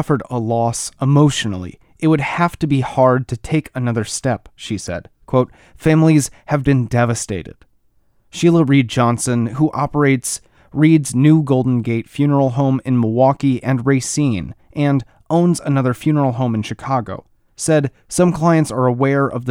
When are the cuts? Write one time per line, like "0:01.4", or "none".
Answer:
0:06.6